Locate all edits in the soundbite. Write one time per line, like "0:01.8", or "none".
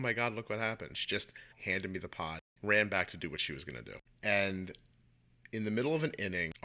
0:01.5
0:04.1